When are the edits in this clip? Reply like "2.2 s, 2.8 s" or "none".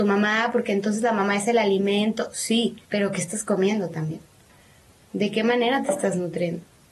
2.9 s